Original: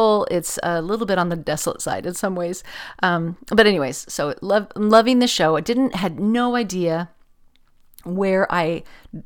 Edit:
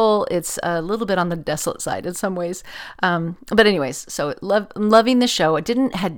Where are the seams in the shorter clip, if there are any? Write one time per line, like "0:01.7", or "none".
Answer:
none